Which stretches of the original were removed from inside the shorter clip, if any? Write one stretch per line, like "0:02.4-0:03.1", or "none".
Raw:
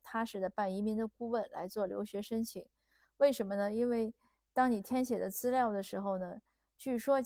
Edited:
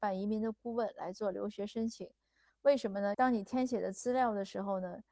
0:03.7-0:04.5